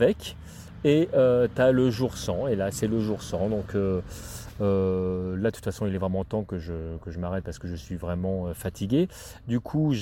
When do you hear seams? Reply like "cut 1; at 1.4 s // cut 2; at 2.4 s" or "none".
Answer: cut 1; at 2.7 s

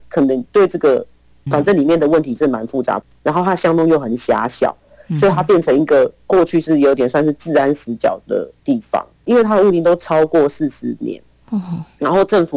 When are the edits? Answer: cut 1; at 1.4 s // cut 2; at 9.1 s

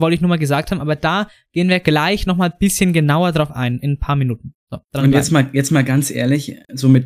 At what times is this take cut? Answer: none

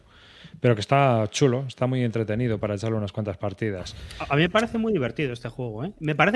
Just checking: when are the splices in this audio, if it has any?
none

